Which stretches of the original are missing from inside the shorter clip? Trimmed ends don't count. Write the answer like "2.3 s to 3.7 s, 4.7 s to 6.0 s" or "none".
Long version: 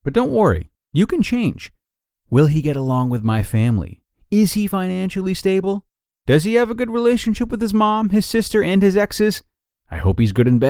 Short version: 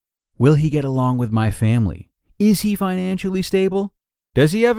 none